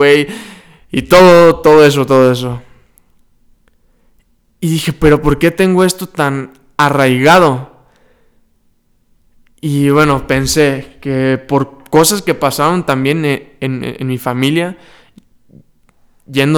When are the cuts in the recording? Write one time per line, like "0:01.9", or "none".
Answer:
none

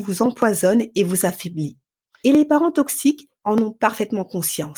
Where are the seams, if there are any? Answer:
0:02.2
0:03.4

